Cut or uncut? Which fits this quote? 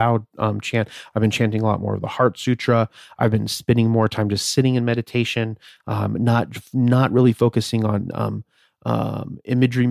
uncut